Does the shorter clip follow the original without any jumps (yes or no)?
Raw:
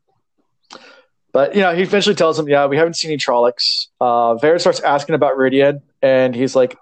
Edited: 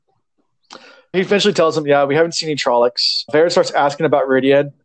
no